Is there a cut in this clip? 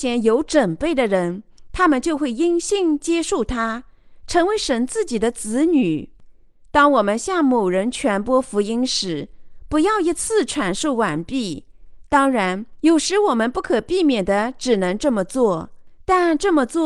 no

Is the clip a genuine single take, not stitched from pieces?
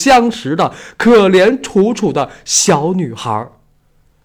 yes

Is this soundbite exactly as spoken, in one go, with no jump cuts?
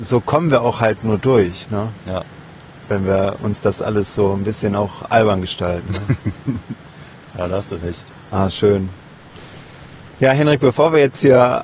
yes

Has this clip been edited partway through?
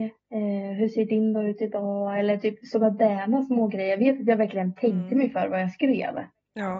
no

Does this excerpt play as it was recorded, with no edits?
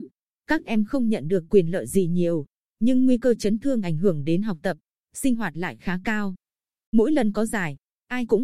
yes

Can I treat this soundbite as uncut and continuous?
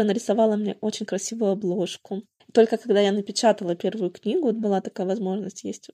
no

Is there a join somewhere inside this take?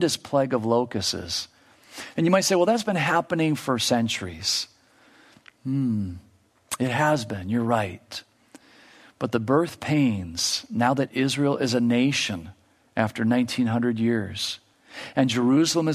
no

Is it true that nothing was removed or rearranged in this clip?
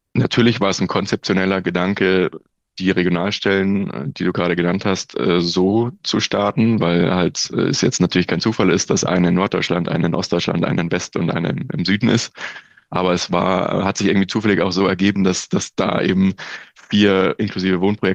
yes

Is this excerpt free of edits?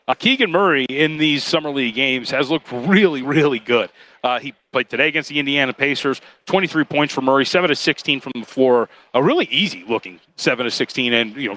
yes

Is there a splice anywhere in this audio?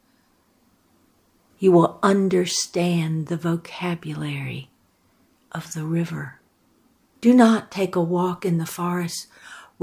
yes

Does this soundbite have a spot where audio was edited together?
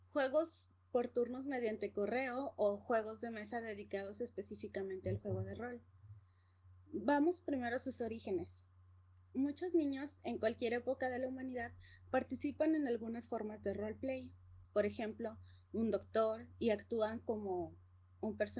yes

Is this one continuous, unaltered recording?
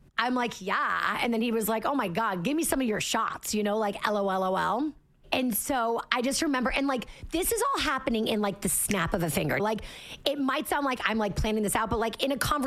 no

